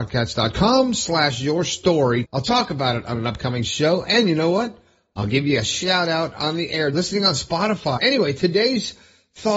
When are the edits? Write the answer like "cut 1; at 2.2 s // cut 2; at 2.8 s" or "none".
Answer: cut 1; at 2.2 s // cut 2; at 6.9 s // cut 3; at 8.0 s